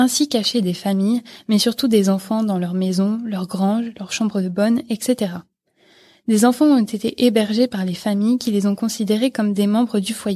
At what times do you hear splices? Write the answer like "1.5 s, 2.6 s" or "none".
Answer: none

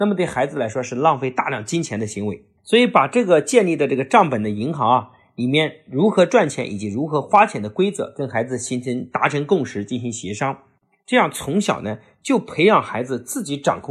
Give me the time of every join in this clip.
2.6 s

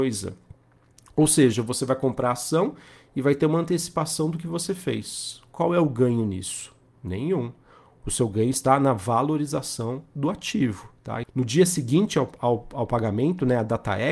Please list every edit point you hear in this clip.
11.2 s

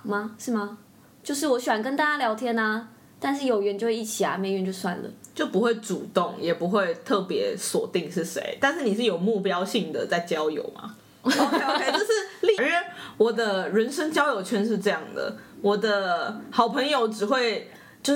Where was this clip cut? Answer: 11.2 s, 12.6 s

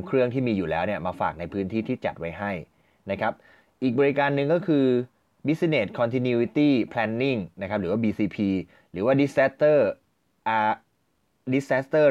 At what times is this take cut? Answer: none

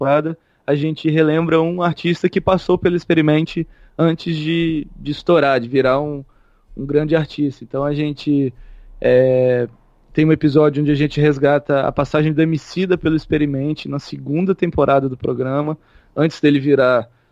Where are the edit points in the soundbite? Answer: none

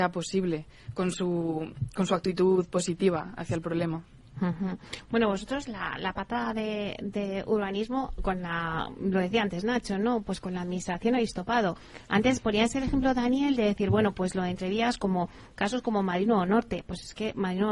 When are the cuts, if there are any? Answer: none

